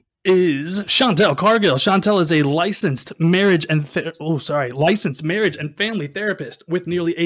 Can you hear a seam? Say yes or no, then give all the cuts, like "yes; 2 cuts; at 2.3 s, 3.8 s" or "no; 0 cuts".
no; 0 cuts